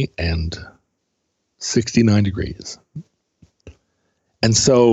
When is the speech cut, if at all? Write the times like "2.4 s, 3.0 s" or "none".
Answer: none